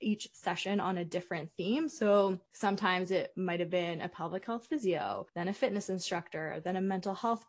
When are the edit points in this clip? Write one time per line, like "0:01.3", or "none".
0:02.5
0:05.3